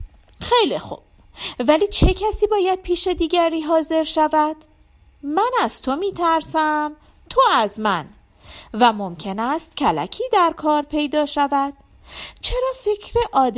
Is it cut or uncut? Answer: uncut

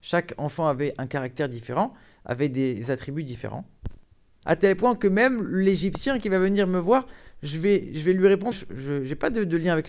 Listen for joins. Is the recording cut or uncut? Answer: cut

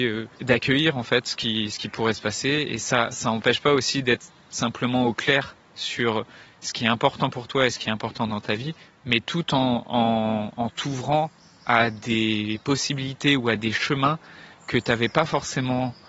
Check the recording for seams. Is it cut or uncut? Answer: uncut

